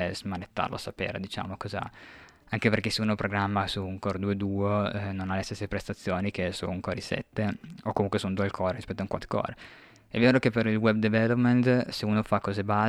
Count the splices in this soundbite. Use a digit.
0